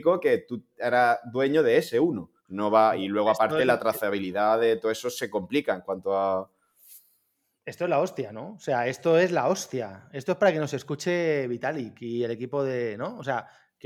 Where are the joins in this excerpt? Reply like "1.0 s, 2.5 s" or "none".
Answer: 2.4 s